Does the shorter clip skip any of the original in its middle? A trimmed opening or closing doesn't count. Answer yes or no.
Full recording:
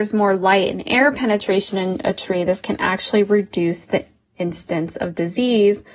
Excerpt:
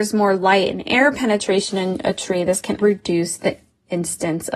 yes